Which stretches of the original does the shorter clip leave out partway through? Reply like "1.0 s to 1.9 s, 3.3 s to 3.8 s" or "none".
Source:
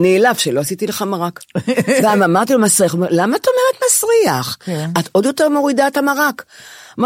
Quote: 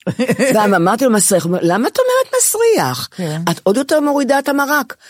none